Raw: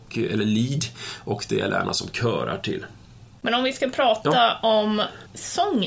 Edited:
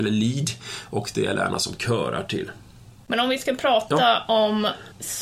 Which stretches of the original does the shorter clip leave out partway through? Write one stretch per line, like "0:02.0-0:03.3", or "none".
none